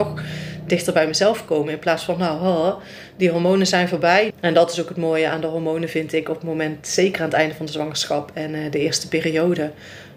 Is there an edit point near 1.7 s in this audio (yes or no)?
no